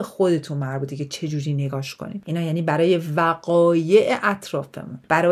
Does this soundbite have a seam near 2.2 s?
yes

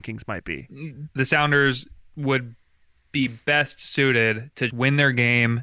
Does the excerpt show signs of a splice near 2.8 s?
no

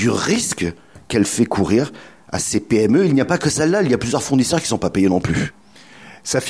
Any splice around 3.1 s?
no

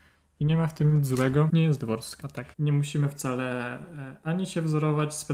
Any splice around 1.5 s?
yes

